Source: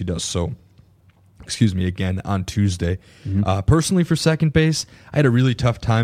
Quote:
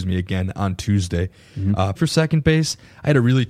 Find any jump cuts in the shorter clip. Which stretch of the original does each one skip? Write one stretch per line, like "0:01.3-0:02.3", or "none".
0:03.6-0:04.0